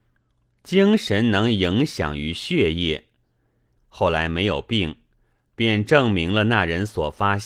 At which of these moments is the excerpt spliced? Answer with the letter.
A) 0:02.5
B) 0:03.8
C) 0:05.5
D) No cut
B